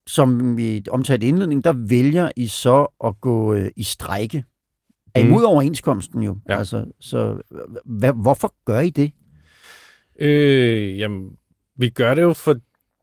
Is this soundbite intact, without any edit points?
no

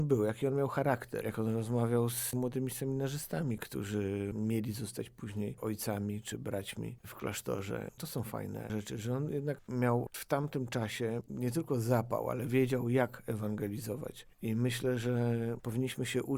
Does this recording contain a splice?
no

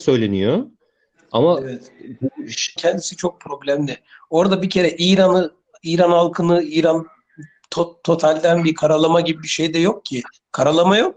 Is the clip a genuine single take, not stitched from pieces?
no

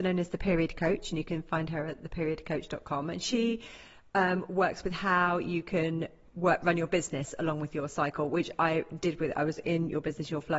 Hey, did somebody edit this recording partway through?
no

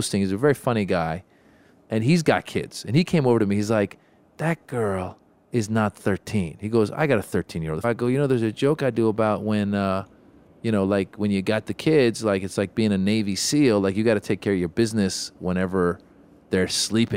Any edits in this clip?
yes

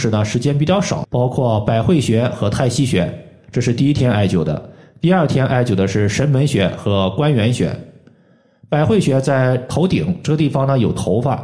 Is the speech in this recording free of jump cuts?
no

